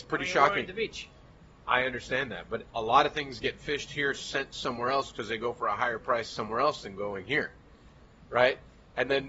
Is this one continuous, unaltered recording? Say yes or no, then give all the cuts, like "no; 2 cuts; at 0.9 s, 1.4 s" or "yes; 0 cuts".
yes; 0 cuts